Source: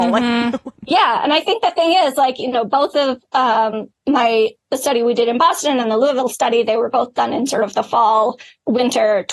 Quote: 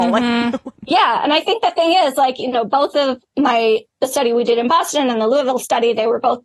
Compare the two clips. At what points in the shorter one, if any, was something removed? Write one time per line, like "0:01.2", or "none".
0:03.2